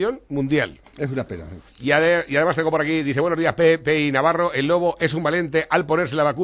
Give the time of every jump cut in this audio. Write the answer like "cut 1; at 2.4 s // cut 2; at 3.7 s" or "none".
cut 1; at 1.7 s